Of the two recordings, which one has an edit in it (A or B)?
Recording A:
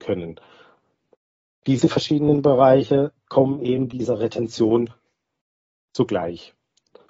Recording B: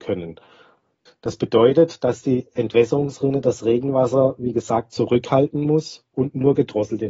B